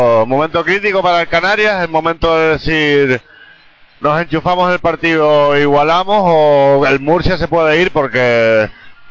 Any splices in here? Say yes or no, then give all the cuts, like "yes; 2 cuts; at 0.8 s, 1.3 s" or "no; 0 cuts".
no; 0 cuts